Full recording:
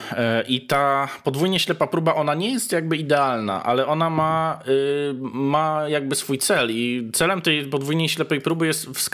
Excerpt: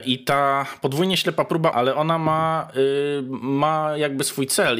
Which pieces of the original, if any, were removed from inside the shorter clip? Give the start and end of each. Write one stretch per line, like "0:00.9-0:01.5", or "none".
0:02.1-0:03.6